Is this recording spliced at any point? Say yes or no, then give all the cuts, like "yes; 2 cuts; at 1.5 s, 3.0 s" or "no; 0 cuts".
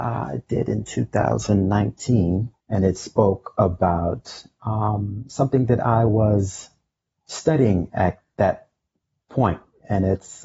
yes; 1 cut; at 2.6 s